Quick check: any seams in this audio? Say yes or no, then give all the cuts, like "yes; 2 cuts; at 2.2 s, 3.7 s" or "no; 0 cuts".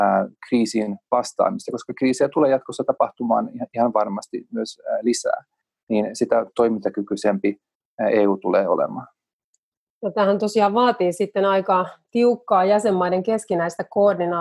no; 0 cuts